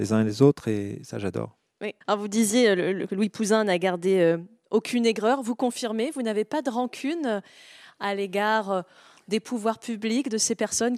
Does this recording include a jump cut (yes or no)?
yes